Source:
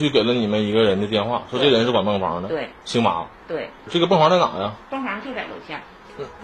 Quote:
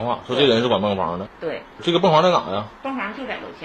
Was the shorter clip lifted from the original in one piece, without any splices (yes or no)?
no